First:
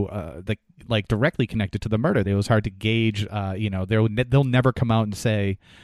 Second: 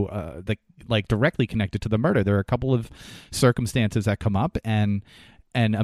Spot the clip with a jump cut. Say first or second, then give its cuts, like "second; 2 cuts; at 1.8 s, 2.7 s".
first; 1 cut; at 2.2 s